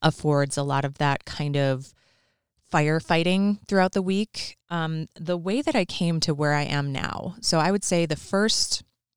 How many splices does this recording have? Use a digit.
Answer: 1